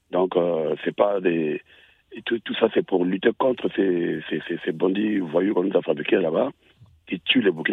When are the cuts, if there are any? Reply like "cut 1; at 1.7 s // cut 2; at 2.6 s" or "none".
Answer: none

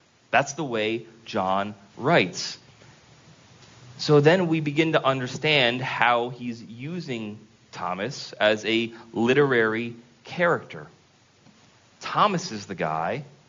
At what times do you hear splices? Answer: none

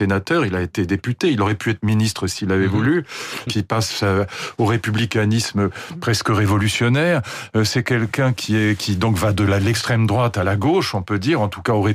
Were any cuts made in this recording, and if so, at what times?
cut 1; at 3.5 s

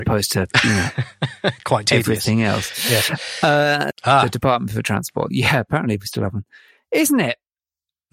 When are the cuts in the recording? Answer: cut 1; at 3.9 s // cut 2; at 5.3 s

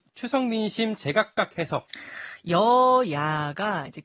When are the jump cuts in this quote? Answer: none

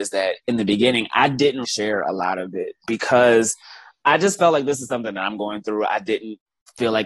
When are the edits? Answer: cut 1; at 1.6 s

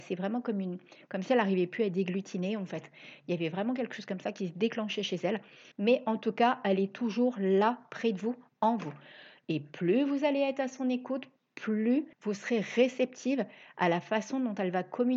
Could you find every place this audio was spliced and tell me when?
cut 1; at 5.7 s // cut 2; at 12.1 s

